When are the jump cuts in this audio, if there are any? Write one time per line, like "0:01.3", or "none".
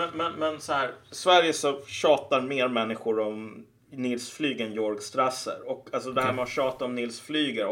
none